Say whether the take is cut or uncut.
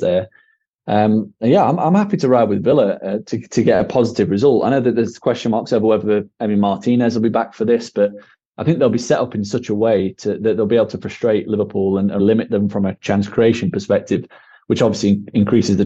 cut